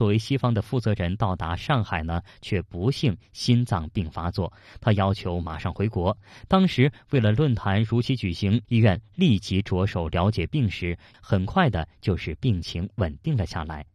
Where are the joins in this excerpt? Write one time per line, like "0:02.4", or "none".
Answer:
0:08.6
0:11.1